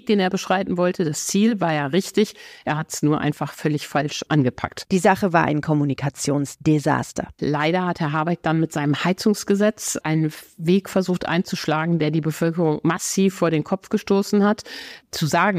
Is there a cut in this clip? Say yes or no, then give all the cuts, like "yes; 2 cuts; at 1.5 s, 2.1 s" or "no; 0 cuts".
yes; 2 cuts; at 4.3 s, 7.4 s